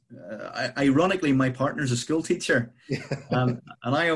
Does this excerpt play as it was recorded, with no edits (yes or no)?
yes